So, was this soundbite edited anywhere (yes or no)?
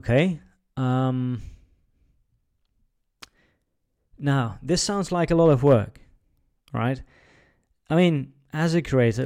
no